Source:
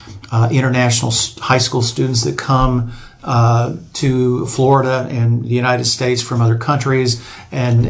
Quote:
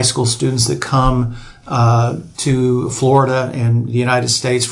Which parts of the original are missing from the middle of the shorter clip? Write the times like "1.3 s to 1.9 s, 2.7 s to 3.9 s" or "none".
none